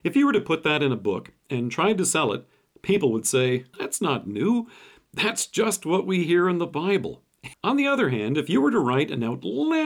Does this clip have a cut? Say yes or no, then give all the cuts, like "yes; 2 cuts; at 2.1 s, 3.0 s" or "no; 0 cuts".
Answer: yes; 2 cuts; at 3.7 s, 7.5 s